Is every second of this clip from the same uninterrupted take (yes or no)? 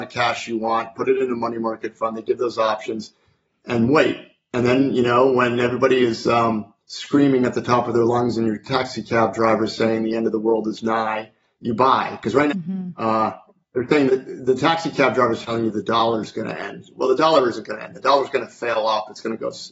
no